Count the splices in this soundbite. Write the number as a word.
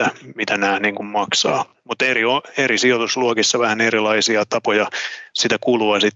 zero